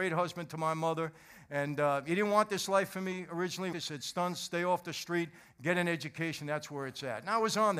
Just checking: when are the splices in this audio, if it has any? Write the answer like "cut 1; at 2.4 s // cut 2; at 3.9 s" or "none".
cut 1; at 3.7 s